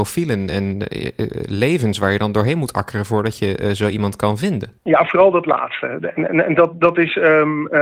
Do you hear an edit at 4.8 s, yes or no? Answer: yes